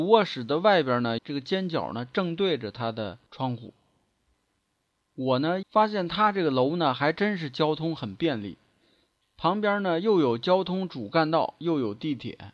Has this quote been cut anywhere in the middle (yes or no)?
yes